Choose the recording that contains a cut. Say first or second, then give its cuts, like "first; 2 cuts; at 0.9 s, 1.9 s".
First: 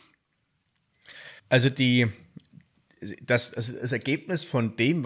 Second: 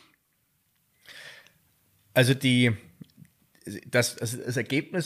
first; 1 cut; at 1.4 s